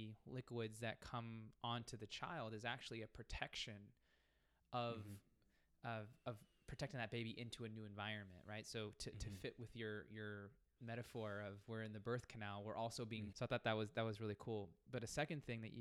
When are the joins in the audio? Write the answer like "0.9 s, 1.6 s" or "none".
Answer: 13.3 s